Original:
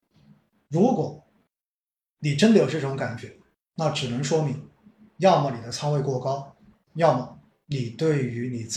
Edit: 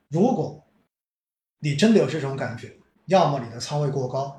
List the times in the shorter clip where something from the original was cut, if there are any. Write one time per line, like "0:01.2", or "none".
0:02.9